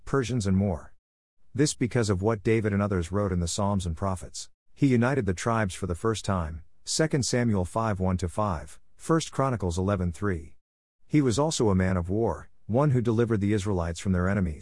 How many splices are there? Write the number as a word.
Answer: one